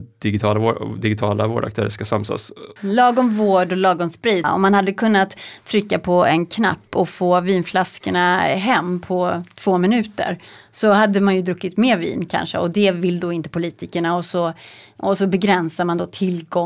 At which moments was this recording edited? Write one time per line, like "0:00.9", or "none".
0:02.8
0:04.4